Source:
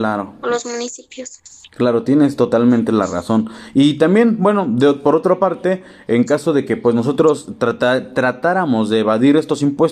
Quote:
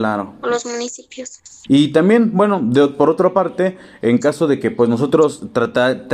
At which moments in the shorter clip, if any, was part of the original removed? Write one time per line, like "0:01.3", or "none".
0:01.7

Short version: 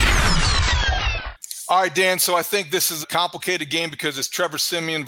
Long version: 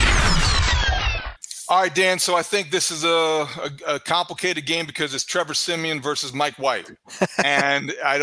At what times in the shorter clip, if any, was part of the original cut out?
0:03.0

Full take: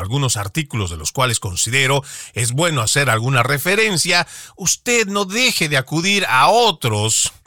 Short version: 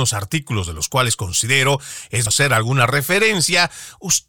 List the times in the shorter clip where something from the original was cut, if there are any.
0:02.3

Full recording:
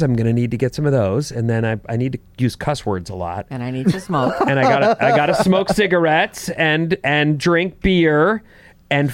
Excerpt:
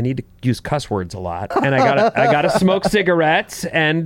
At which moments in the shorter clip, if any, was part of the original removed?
0:01.5

